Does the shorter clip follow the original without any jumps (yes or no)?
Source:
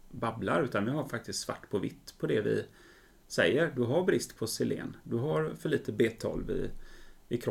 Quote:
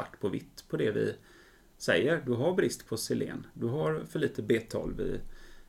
yes